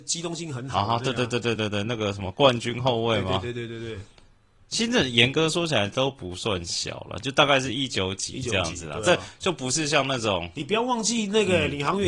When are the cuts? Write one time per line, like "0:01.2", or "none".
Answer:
0:01.6